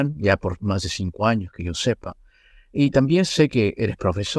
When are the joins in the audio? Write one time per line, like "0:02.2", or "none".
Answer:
none